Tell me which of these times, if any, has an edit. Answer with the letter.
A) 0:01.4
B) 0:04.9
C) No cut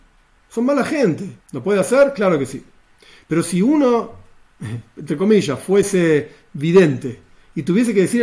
A